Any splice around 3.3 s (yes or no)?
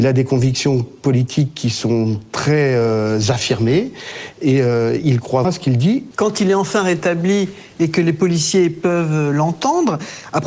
no